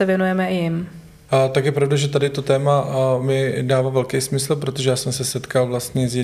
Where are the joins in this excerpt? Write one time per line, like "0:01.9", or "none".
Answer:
0:01.3